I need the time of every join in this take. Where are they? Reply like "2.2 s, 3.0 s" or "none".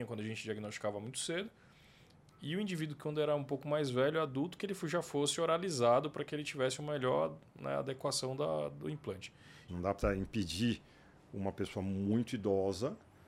9.7 s